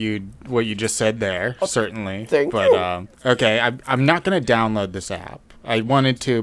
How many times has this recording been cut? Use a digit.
1